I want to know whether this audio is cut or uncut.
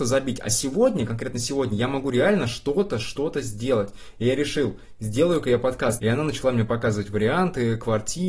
cut